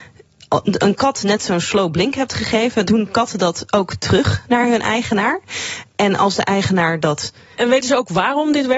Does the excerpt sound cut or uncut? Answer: cut